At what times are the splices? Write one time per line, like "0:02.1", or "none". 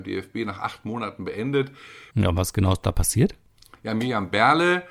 0:02.1